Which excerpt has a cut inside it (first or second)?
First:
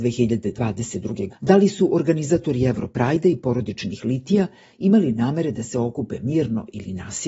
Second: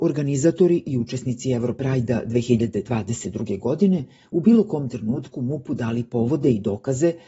first